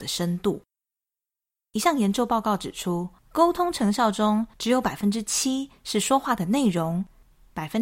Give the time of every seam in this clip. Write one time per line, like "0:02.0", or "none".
0:03.2